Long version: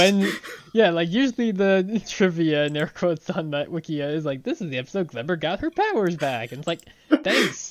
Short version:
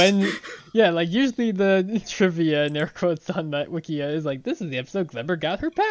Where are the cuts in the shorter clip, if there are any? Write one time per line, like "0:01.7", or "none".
none